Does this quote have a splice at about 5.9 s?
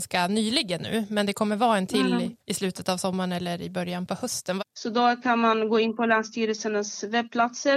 no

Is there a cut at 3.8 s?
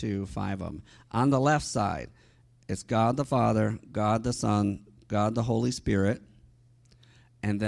no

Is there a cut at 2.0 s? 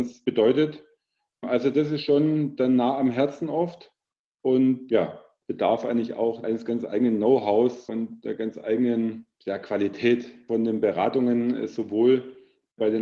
no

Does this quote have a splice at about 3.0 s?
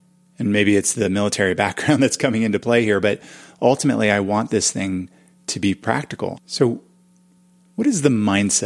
no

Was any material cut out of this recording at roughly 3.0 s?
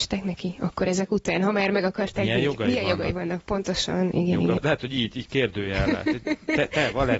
no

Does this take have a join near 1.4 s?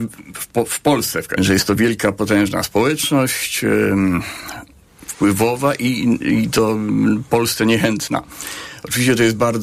yes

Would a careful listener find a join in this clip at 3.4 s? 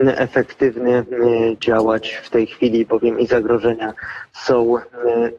no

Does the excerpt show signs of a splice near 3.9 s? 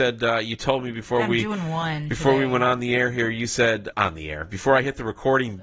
yes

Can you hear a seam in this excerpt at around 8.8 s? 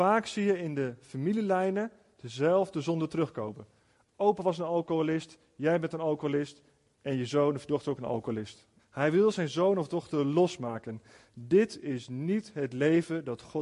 yes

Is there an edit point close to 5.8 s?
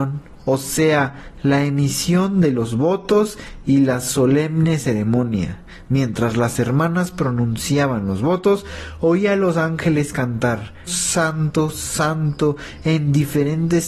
no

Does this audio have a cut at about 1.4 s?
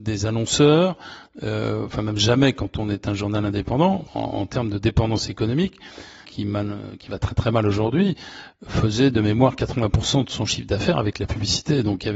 no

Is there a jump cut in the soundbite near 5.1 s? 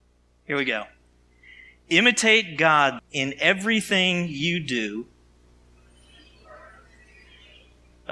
no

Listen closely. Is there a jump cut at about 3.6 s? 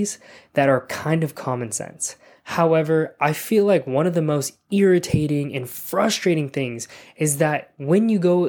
no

